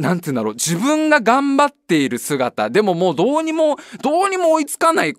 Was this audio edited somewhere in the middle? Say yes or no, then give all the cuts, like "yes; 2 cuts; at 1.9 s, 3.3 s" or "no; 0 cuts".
no; 0 cuts